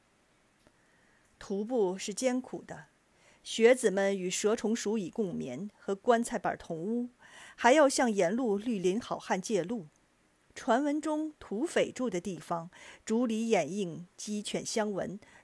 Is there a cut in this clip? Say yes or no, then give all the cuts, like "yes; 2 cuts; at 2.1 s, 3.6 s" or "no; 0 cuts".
no; 0 cuts